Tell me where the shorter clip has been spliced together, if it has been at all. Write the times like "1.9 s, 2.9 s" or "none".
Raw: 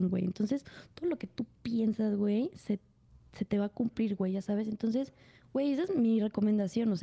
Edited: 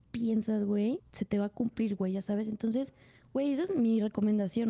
1.0 s